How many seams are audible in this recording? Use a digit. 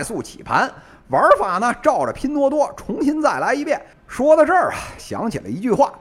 2